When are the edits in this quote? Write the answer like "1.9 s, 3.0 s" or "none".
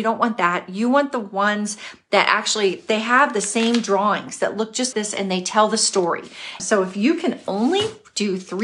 4.9 s, 6.6 s